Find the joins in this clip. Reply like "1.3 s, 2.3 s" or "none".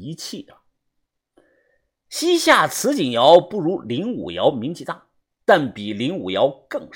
none